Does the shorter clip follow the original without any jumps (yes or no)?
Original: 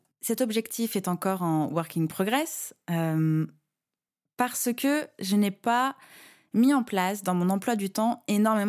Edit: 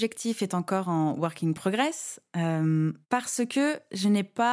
no